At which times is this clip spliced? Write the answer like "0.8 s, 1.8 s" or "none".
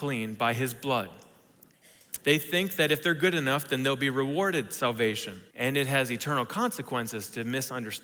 2.2 s, 5.5 s